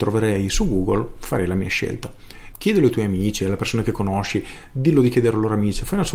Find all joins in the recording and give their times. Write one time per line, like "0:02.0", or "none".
0:02.5